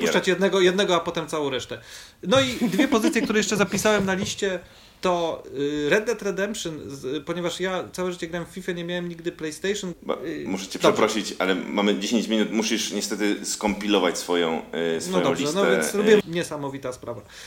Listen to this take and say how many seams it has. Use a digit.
2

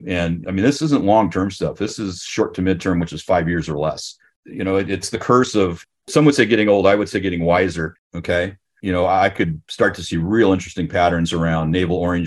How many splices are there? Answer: 1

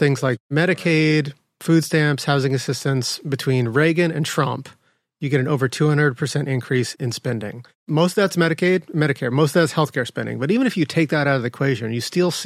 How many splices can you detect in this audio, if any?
0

